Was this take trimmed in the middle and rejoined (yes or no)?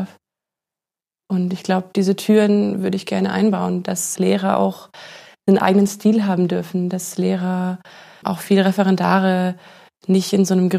yes